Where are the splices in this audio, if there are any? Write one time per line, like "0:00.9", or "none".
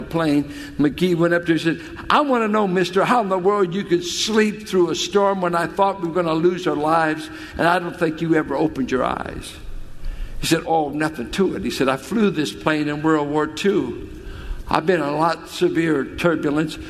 0:10.6